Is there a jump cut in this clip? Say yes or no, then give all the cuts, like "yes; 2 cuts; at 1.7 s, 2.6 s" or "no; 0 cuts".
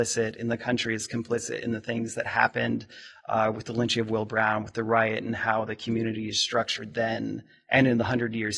no; 0 cuts